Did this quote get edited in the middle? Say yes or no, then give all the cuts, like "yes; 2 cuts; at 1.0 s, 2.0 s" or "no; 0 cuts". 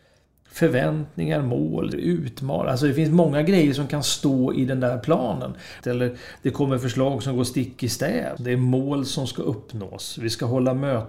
yes; 3 cuts; at 1.9 s, 5.8 s, 8.4 s